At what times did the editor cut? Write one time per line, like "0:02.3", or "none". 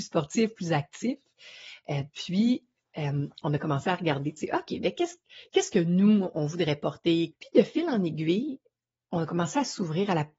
0:07.3